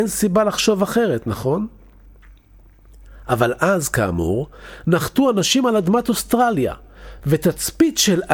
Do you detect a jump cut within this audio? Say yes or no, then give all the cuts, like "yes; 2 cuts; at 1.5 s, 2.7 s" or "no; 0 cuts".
no; 0 cuts